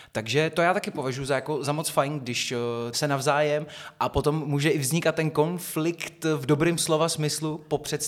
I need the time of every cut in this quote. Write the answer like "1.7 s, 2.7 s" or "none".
2.9 s